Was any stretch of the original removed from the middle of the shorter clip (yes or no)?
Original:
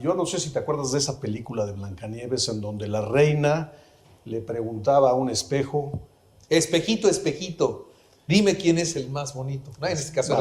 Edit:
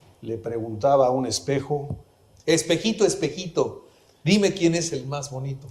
no